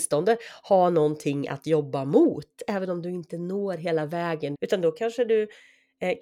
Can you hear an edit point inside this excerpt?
yes; 1 cut; at 4.5 s

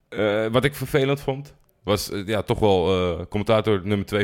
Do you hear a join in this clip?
no; 0 cuts

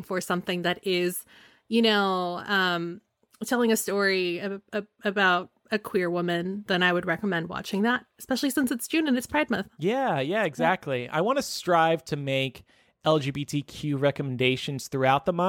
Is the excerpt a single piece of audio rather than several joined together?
yes; 0 cuts

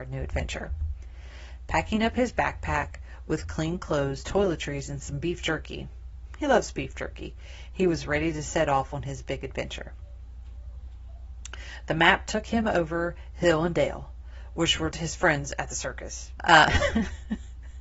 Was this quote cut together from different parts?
yes; 2 cuts; at 14.9 s, 16.4 s

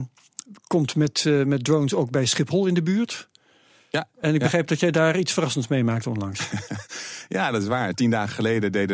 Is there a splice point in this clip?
no; 0 cuts

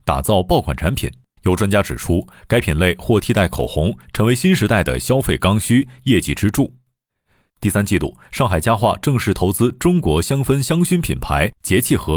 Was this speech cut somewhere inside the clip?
yes; 2 cuts; at 1.4 s, 7.5 s

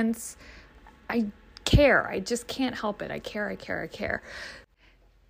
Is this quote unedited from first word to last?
yes; 0 cuts

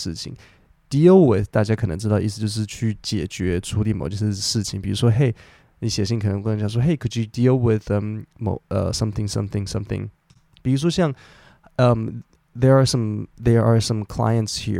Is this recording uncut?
no; 1 cut; at 10.5 s

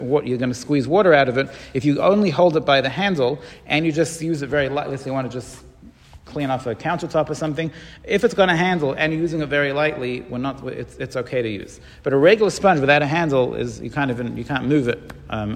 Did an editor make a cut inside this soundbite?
no; 0 cuts

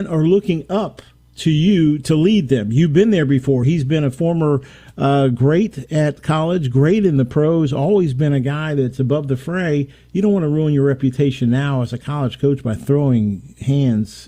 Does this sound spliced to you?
no; 0 cuts

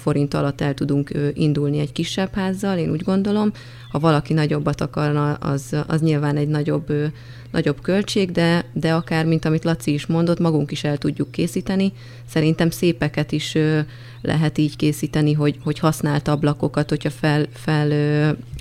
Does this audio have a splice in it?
no; 0 cuts

